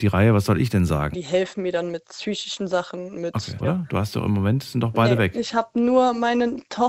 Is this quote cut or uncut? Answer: cut